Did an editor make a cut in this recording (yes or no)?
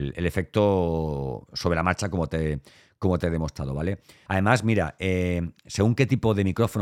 yes